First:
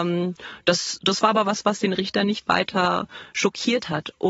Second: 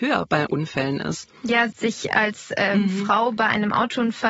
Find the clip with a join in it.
second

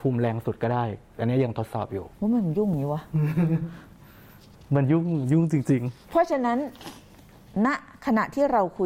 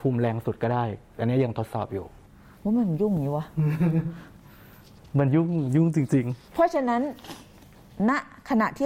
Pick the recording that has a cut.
first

